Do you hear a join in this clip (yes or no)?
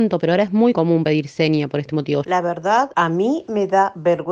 yes